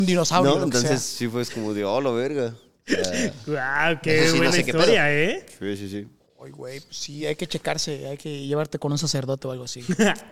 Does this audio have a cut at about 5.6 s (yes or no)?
no